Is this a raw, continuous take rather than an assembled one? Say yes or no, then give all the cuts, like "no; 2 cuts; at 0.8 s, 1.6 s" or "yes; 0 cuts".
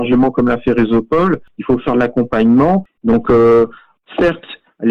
no; 1 cut; at 3.0 s